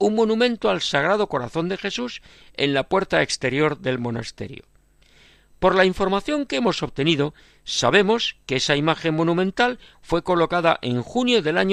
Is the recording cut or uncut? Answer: uncut